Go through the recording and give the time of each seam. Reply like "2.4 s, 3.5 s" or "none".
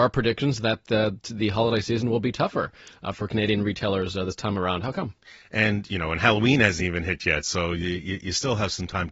none